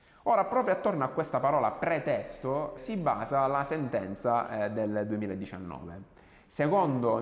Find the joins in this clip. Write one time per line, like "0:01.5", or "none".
0:02.8